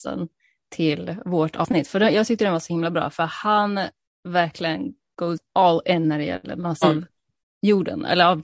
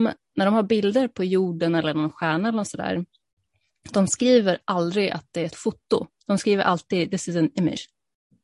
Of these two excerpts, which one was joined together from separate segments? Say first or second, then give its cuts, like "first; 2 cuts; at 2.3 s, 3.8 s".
first; 1 cut; at 6.8 s